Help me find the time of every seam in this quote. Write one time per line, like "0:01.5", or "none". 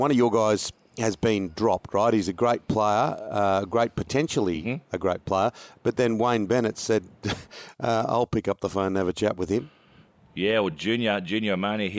none